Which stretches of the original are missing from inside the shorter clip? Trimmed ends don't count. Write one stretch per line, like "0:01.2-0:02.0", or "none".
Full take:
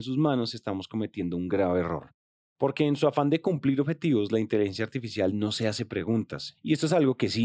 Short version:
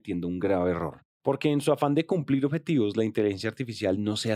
0:02.2-0:02.5